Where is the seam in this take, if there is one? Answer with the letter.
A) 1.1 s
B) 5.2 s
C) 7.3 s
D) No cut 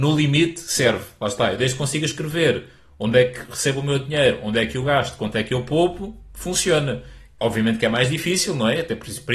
D